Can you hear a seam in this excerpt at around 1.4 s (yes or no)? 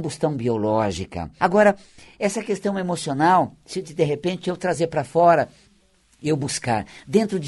yes